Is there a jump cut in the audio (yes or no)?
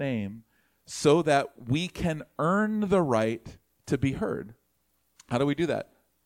no